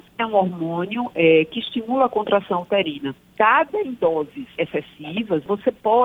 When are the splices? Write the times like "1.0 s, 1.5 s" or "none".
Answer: none

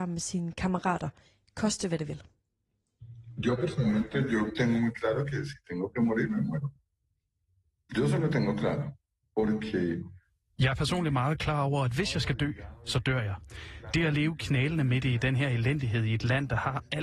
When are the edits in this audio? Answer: none

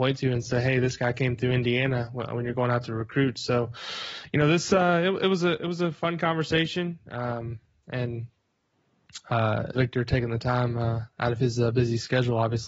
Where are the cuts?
9.7 s

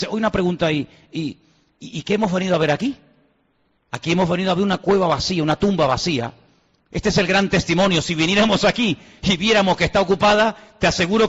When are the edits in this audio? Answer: 3.8 s

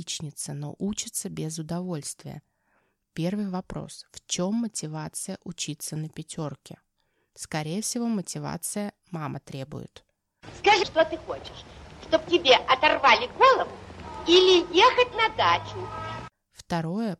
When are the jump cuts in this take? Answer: 10.8 s

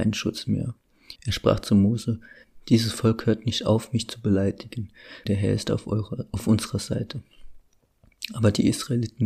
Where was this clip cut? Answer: 1.2 s, 5.3 s

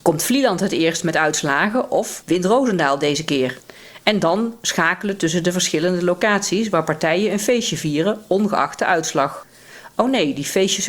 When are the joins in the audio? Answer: none

